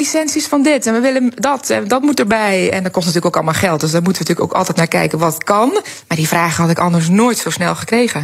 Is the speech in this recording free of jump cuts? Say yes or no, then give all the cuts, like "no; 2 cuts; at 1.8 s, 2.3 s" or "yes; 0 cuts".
yes; 0 cuts